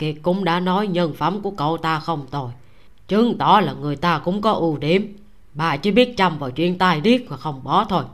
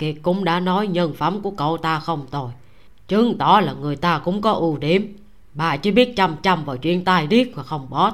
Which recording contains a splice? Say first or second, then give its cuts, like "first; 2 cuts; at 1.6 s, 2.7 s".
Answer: first; 1 cut; at 6.2 s